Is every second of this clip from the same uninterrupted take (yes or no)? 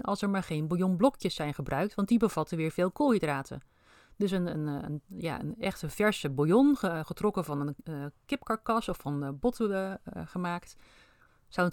yes